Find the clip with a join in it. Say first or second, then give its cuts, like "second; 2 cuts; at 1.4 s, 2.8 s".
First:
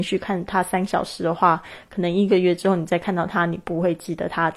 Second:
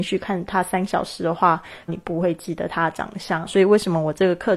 second; 2 cuts; at 1.9 s, 3.4 s